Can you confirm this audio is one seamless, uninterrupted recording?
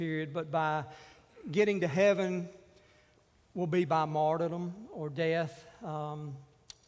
yes; 0 cuts

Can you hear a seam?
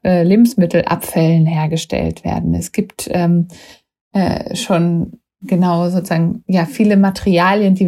no; 0 cuts

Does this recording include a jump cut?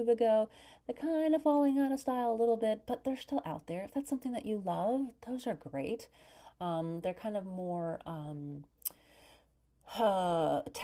no; 0 cuts

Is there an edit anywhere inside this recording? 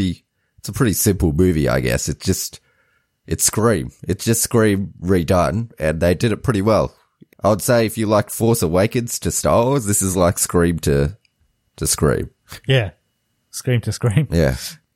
no; 0 cuts

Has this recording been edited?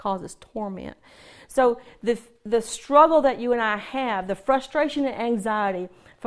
no; 0 cuts

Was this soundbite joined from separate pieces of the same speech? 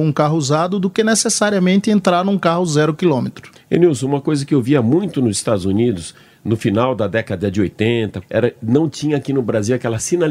yes; 2 cuts; at 3.6 s, 8.2 s

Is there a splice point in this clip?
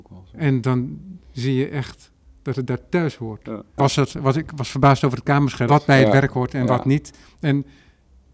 yes; 3 cuts; at 3.8 s, 5.7 s, 7.2 s

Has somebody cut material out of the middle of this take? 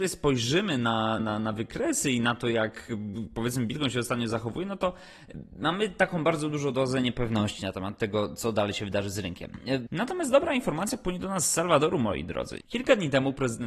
yes; 3 cuts; at 1.2 s, 9.9 s, 12.6 s

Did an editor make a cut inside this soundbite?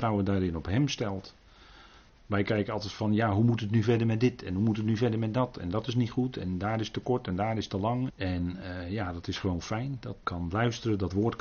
yes; 3 cuts; at 2.1 s, 8.1 s, 10.2 s

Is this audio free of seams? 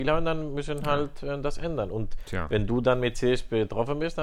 yes; 0 cuts

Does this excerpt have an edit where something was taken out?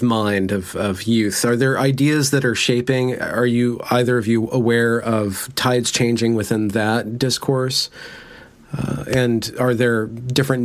no; 0 cuts

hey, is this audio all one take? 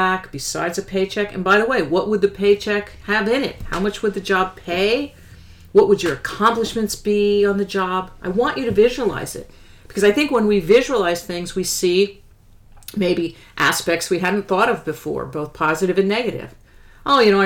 yes; 0 cuts

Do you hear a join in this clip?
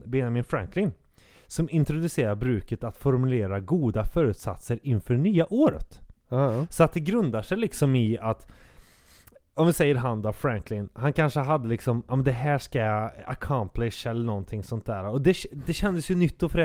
no; 0 cuts

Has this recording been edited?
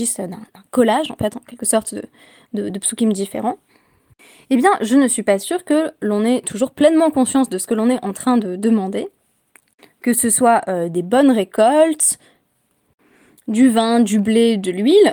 no; 0 cuts

